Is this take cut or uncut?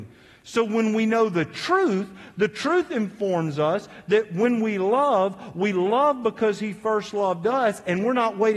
uncut